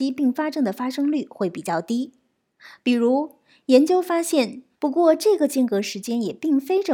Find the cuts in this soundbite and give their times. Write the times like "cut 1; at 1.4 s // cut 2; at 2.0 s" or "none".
cut 1; at 2.8 s // cut 2; at 4.7 s